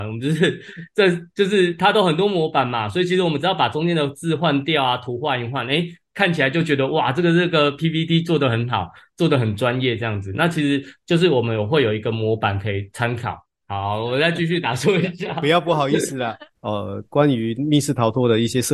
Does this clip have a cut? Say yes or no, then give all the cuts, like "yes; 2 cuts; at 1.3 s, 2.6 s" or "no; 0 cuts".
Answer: yes; 1 cut; at 16.5 s